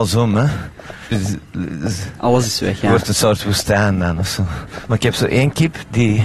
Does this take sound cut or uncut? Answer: cut